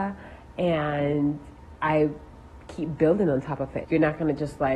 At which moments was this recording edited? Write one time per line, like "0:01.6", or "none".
0:03.8